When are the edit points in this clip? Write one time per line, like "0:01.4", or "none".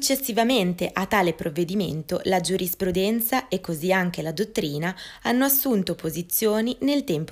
none